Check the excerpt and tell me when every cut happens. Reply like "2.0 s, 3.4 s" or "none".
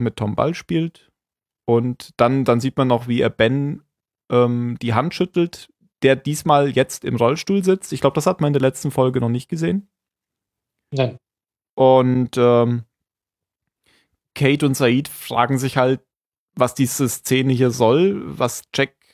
none